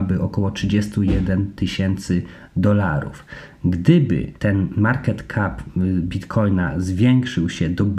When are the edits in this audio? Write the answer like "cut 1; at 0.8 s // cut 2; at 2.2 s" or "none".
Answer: cut 1; at 4.4 s